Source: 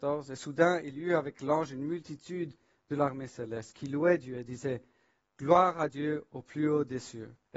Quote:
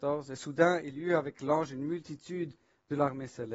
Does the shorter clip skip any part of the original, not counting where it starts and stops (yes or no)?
no